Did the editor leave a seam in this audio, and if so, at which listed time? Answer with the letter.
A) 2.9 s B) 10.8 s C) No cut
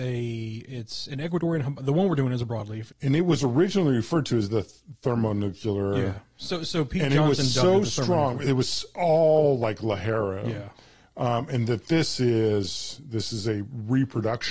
A